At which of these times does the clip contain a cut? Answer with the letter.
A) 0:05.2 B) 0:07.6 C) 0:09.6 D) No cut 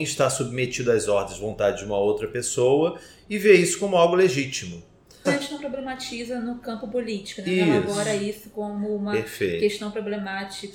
A